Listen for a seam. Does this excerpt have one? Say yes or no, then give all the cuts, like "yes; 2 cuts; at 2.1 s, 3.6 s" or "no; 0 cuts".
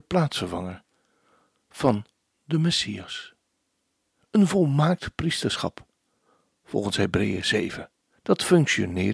yes; 1 cut; at 4.2 s